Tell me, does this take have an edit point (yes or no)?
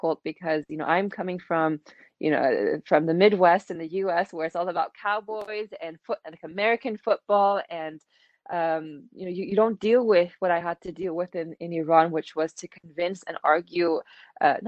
no